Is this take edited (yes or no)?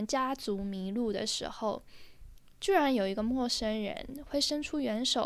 no